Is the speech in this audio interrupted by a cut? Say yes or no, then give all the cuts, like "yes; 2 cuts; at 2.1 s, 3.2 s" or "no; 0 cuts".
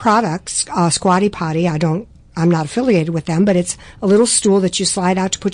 no; 0 cuts